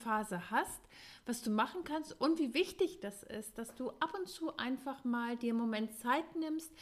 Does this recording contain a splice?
no; 0 cuts

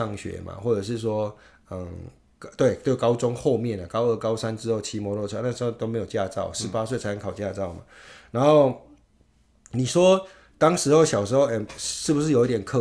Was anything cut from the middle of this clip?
no; 0 cuts

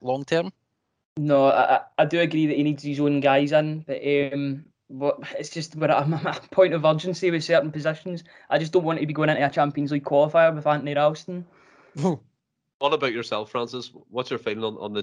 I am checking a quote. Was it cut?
no; 0 cuts

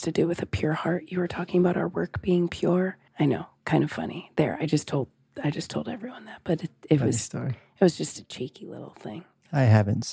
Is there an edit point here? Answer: yes; 1 cut; at 3.1 s

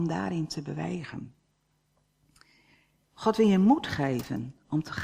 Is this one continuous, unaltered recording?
yes; 0 cuts

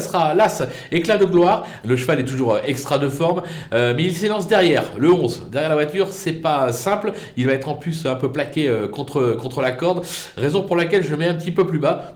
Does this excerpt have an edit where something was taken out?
yes; 1 cut; at 1.8 s

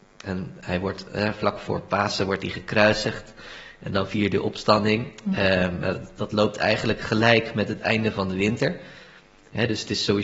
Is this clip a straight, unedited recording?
yes; 0 cuts

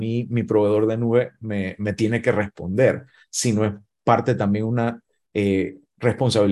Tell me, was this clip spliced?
no; 0 cuts

